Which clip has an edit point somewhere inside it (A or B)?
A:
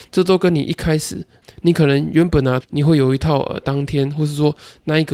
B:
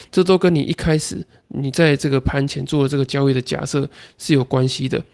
A